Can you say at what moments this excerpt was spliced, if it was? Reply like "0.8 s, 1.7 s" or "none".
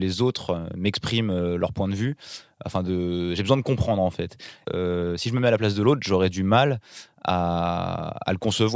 4.6 s